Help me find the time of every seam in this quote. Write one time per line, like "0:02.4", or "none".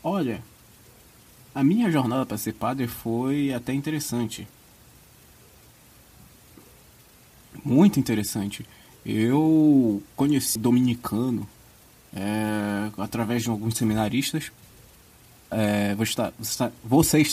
0:10.6
0:15.5